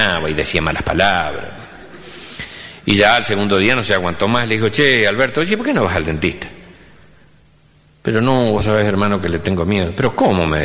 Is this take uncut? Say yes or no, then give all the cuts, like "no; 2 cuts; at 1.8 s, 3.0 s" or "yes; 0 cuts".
yes; 0 cuts